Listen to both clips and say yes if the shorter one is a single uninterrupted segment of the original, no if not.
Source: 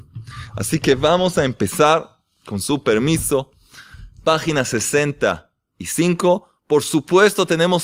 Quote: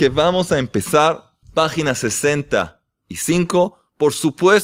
no